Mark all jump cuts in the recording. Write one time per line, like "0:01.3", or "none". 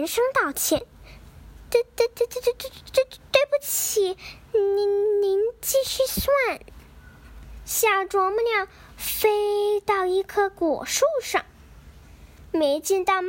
none